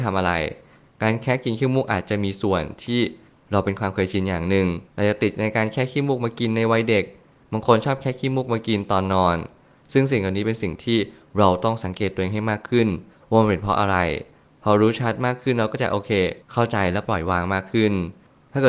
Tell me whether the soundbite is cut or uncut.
cut